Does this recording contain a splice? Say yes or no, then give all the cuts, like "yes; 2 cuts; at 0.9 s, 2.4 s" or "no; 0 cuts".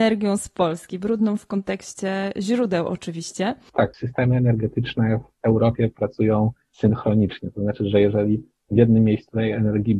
yes; 1 cut; at 3.7 s